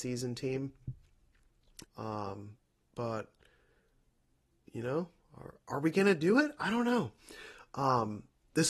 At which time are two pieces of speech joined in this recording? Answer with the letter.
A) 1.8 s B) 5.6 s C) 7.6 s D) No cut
A